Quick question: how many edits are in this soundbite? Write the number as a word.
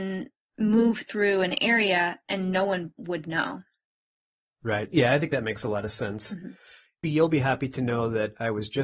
zero